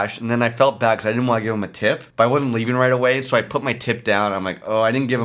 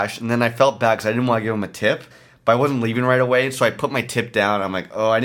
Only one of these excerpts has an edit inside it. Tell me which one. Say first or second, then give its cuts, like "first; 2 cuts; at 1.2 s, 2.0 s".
first; 1 cut; at 2.1 s